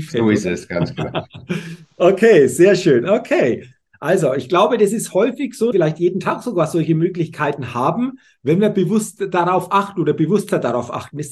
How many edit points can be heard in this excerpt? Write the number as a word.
two